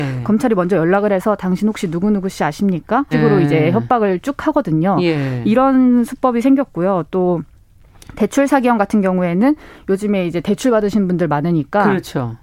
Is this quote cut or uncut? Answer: cut